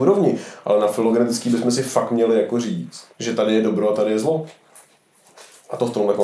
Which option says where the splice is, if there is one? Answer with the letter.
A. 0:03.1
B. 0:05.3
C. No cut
A